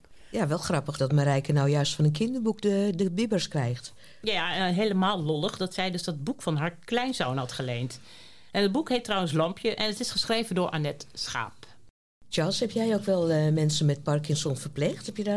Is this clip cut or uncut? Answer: cut